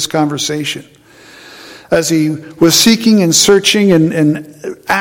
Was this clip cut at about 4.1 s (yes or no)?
no